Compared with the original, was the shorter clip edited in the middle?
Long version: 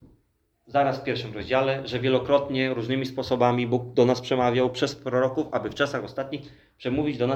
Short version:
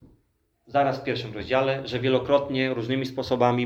no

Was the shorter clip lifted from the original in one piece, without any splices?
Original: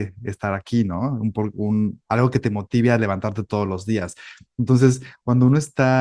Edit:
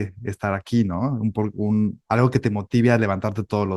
yes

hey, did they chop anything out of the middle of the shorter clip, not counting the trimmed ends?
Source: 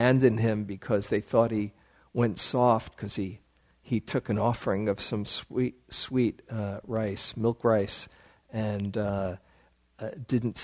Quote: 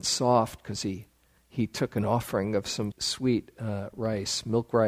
yes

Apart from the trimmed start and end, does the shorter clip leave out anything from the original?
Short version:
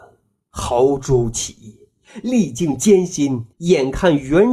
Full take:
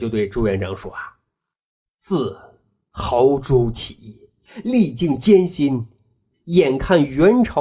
yes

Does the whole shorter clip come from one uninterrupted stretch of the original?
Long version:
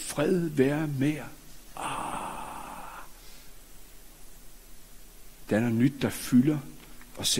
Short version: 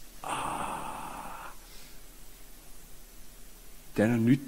yes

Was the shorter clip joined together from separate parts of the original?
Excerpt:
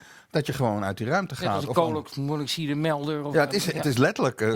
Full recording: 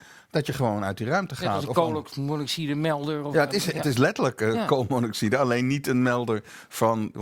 no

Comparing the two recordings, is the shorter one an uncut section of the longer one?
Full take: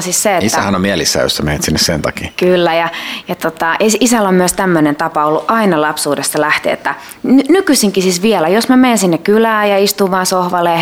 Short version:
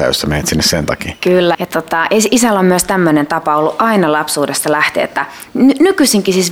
no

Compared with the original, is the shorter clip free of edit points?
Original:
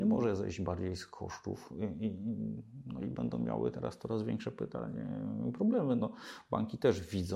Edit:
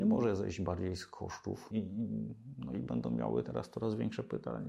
no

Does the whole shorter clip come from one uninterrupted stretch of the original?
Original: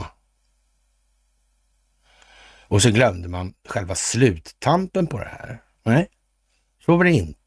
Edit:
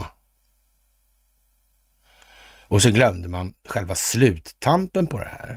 yes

